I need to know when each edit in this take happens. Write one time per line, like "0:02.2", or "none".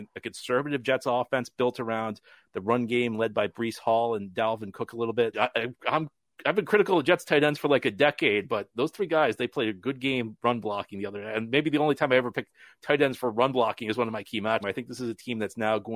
0:05.3
0:14.6